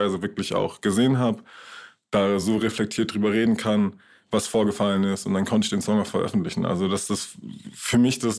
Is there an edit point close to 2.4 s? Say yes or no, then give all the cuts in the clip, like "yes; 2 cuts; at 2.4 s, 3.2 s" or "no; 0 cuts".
no; 0 cuts